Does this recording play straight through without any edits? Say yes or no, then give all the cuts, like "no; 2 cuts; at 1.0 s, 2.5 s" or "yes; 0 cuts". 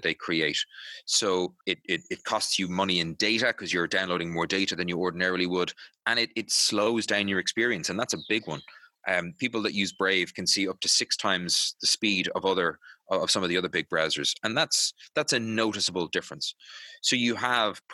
no; 1 cut; at 1.6 s